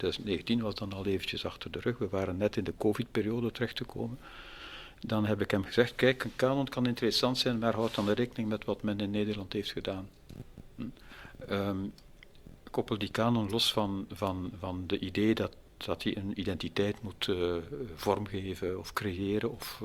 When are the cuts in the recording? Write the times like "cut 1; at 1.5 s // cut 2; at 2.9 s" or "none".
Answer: none